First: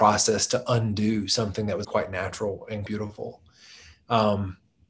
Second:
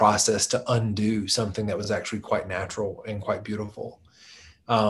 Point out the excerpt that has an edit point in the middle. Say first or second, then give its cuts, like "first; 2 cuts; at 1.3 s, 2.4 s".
first; 2 cuts; at 1.8 s, 2.9 s